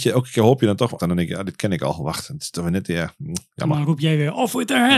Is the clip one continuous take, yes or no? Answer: no